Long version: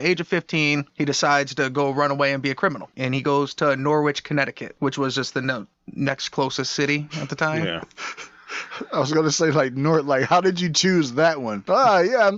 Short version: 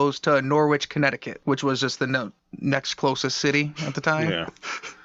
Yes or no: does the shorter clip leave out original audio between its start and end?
no